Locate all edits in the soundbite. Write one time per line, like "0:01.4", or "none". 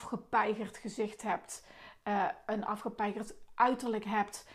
none